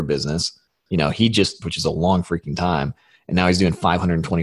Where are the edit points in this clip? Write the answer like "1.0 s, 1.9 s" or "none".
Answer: 1.6 s